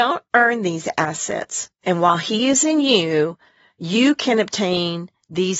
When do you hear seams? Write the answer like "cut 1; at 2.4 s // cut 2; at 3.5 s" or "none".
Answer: cut 1; at 1.8 s

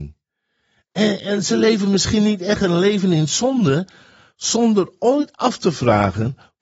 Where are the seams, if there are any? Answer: cut 1; at 4.3 s

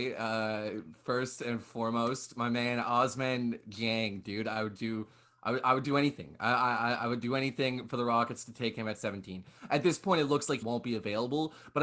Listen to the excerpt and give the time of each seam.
cut 1; at 10.6 s

